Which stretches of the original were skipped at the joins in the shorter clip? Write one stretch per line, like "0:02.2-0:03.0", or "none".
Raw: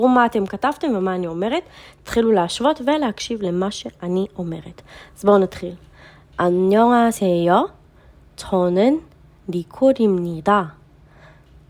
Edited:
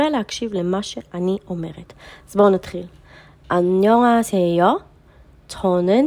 none